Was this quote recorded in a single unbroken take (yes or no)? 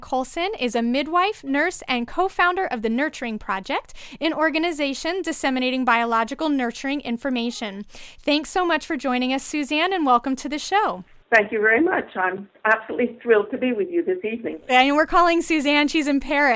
no